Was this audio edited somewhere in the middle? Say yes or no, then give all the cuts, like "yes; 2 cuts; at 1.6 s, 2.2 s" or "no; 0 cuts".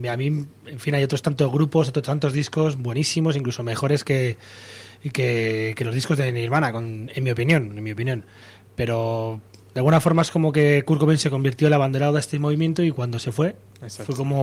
no; 0 cuts